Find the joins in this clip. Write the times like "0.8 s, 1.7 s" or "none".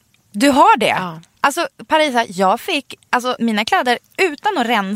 3.4 s